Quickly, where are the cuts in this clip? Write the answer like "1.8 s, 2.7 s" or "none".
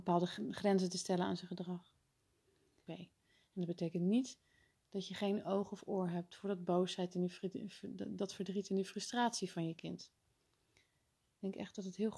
2.9 s